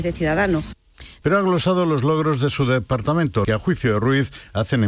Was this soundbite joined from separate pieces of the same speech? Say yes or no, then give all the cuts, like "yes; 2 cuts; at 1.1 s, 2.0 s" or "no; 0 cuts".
yes; 2 cuts; at 1.2 s, 3.4 s